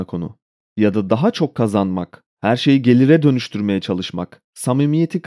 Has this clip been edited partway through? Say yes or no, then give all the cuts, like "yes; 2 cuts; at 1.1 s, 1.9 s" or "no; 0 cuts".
no; 0 cuts